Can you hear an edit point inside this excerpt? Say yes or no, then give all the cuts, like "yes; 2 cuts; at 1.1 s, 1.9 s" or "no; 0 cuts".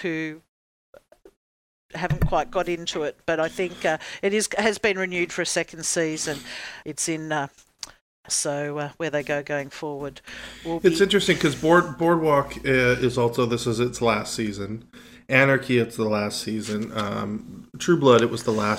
yes; 2 cuts; at 6.8 s, 8.3 s